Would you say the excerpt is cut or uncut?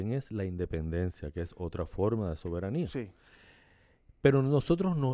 uncut